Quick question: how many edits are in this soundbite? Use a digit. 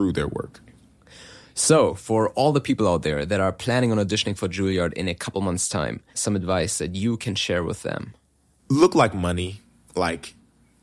1